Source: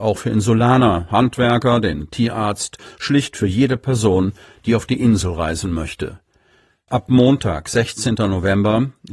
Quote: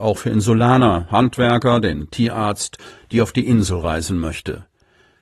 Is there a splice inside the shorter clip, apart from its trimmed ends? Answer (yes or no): yes